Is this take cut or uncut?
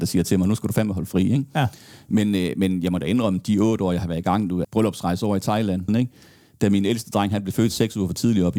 cut